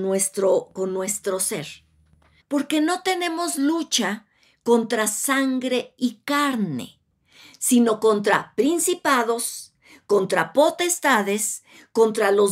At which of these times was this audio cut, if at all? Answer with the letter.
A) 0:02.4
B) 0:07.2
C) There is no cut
A